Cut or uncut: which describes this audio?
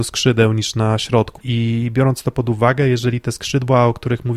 cut